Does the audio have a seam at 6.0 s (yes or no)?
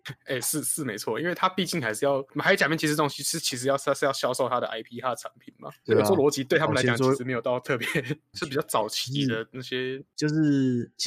no